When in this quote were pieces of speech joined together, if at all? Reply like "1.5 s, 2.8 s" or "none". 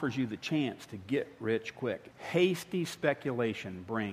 2.1 s